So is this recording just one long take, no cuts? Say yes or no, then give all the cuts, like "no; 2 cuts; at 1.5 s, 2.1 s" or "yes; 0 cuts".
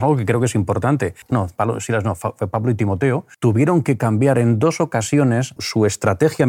no; 3 cuts; at 1.2 s, 3.3 s, 5.6 s